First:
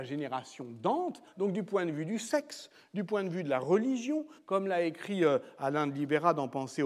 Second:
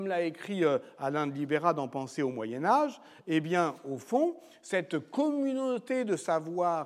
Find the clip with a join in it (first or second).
first